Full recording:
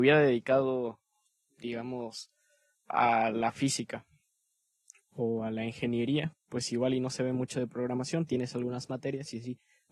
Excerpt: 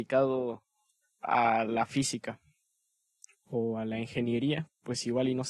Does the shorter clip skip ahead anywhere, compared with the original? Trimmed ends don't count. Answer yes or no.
yes